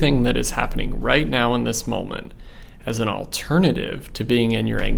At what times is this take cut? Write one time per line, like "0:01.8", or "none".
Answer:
none